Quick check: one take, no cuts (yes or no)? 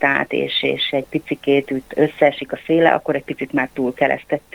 yes